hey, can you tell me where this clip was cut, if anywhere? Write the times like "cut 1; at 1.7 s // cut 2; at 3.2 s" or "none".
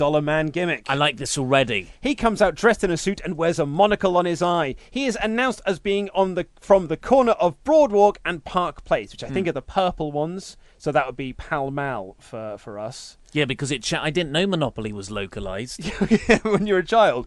none